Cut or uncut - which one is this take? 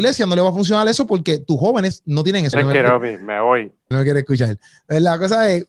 cut